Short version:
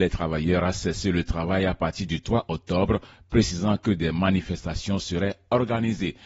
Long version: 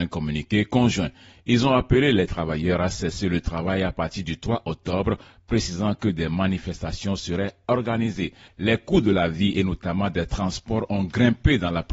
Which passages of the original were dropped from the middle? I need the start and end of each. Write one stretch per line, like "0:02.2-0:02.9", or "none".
none